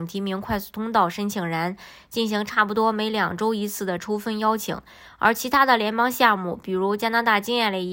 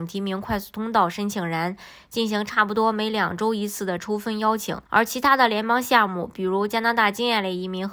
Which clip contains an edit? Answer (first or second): second